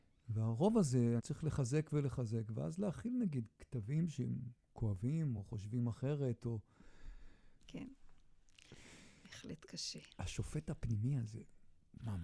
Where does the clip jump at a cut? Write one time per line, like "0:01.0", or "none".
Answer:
0:01.2
0:05.4
0:07.6